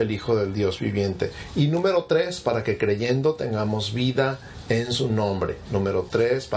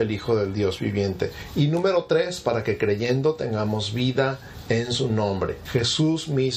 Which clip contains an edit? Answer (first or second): second